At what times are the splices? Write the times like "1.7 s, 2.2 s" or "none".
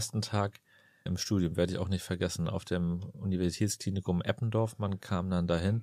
1.1 s